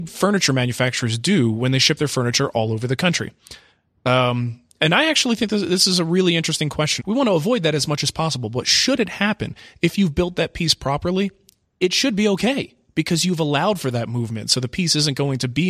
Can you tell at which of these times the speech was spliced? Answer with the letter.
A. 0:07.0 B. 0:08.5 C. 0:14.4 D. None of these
A